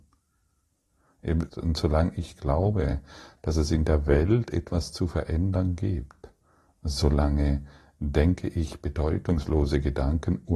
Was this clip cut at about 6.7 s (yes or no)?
no